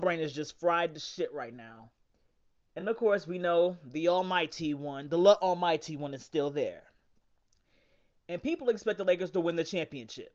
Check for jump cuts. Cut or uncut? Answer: uncut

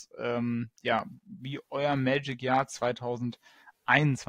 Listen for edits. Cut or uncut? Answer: uncut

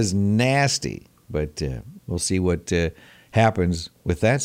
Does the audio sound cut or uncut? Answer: cut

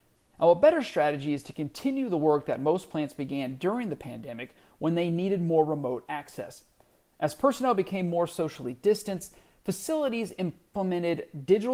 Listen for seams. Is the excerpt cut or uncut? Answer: uncut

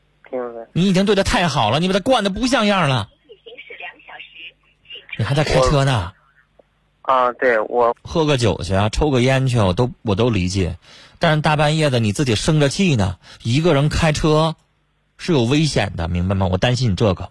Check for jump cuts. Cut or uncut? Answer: cut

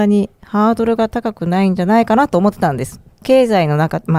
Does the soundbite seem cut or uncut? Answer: cut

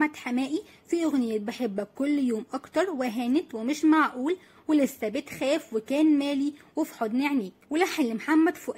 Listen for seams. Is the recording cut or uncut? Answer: cut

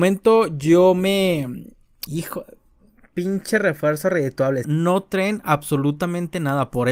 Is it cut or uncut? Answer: cut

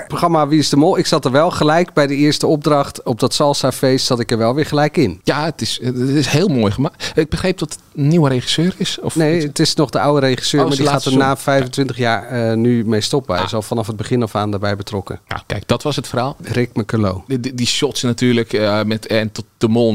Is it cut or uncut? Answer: uncut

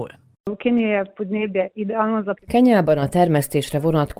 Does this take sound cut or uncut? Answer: uncut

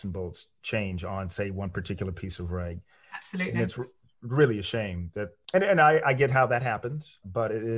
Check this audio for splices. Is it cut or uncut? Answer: uncut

